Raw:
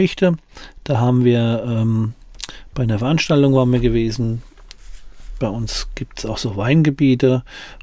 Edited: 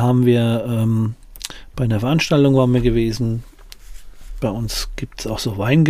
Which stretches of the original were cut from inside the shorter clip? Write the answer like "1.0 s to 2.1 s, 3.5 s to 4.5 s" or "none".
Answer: none

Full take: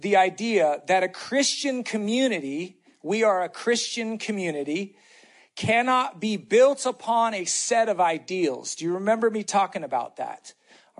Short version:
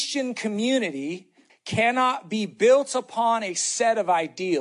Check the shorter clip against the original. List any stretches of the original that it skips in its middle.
3.0 s to 5.4 s

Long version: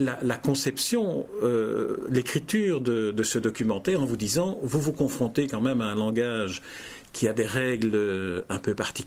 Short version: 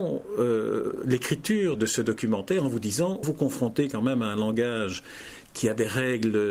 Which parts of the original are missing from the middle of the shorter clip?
2.8 s to 3.1 s, 4.6 s to 4.8 s

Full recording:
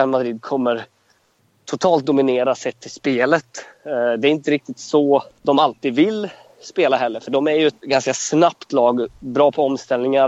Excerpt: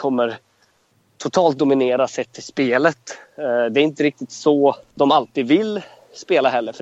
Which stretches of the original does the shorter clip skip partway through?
none

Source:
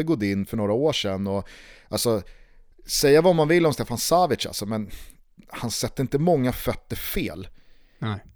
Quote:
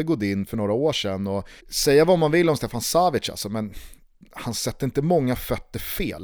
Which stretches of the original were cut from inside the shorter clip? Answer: 1.6 s to 2.8 s

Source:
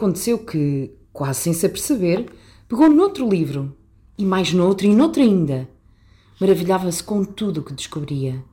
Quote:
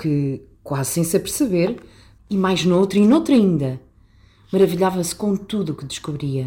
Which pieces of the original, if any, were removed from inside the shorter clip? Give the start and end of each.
2.7 s to 4.1 s

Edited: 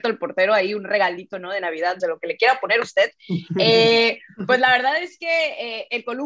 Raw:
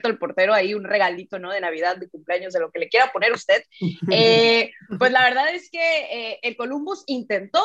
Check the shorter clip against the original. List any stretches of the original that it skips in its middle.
2.0 s to 2.5 s

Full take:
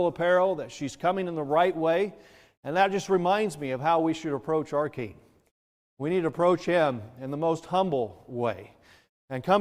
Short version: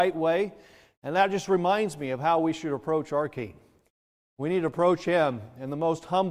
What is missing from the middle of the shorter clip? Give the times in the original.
none

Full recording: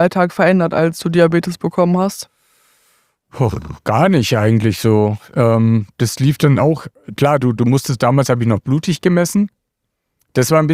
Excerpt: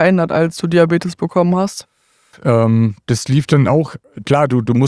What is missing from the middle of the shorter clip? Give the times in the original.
2.8 s to 5.2 s

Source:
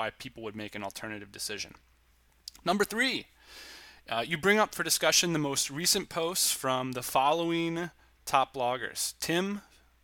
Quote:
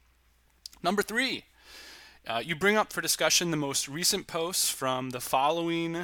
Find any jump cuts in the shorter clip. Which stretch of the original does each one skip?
none

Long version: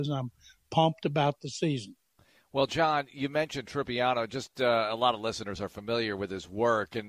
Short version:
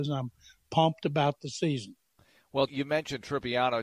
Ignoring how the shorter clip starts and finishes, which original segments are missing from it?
2.7 s to 3.1 s

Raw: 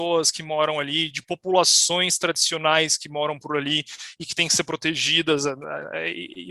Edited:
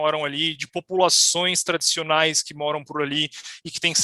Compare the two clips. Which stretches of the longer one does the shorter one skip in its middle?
none

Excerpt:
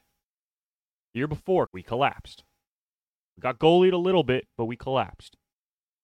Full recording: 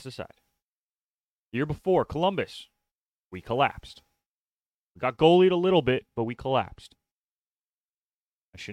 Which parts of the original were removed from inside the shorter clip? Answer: 2.0 s to 3.3 s

